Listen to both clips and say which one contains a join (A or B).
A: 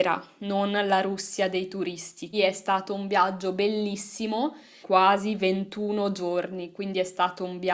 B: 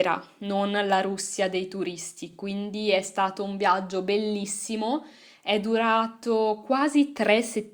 A